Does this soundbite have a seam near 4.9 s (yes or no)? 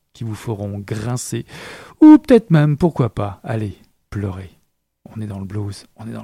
no